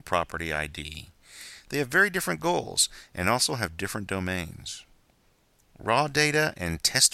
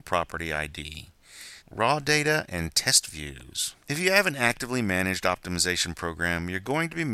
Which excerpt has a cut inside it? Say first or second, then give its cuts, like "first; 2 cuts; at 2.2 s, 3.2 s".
second; 2 cuts; at 1.6 s, 3.8 s